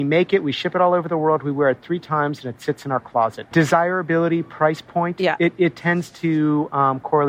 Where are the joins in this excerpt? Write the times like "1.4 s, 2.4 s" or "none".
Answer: 3.5 s